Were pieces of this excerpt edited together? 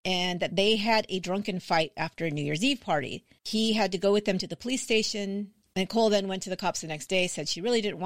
yes; 1 cut; at 5.6 s

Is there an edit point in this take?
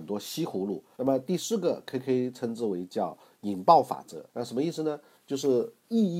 yes; 2 cuts; at 1.0 s, 4.3 s

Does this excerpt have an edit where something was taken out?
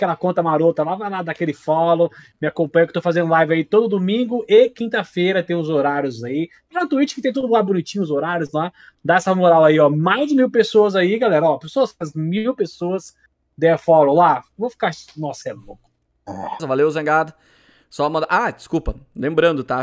yes; 2 cuts; at 15.4 s, 16.6 s

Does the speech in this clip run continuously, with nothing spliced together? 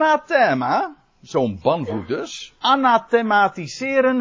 no; 1 cut; at 2.6 s

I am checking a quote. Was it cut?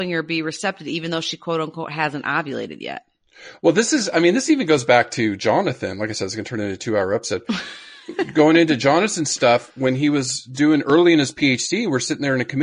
no; 0 cuts

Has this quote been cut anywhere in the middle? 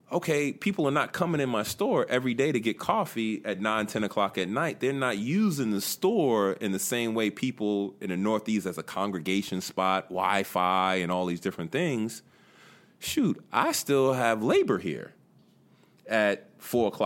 no; 0 cuts

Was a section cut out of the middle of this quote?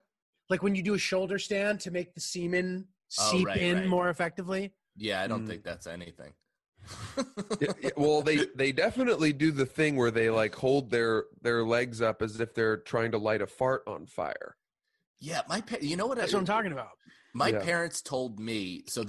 no; 0 cuts

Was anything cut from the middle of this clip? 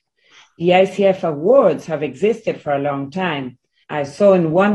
yes; 1 cut; at 3.8 s

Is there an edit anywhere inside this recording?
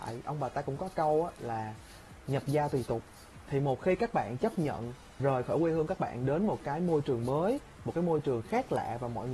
yes; 1 cut; at 5.2 s

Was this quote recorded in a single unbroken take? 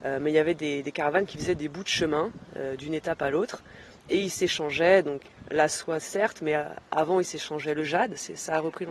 yes; 0 cuts

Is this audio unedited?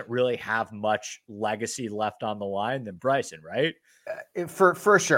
yes; 0 cuts

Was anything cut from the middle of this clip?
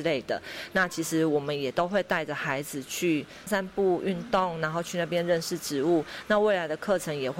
yes; 1 cut; at 3.5 s

